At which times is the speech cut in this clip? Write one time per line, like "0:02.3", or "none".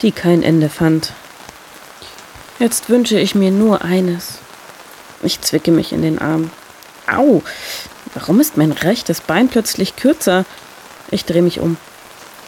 0:02.5
0:05.1
0:08.1